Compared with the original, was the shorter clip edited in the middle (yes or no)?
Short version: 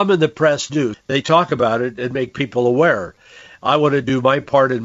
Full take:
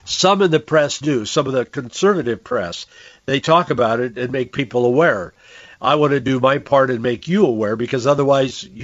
yes